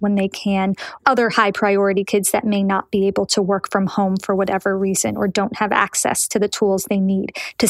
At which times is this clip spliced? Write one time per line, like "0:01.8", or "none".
0:01.0
0:02.1

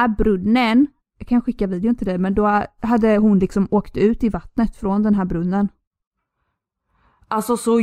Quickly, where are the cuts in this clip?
0:01.0

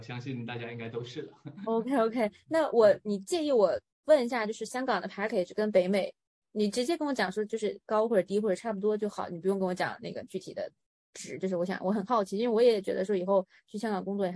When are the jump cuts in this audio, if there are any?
none

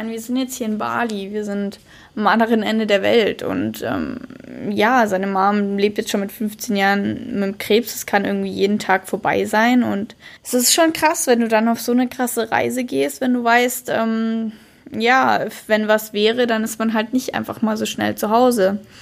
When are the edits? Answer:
0:10.4

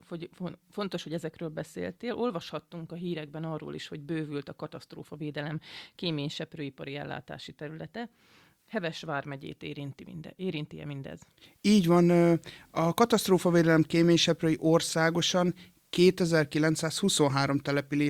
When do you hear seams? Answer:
none

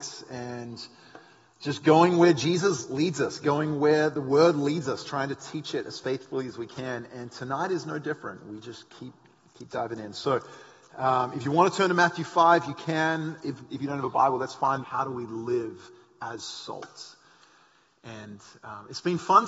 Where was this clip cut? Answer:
0:14.8

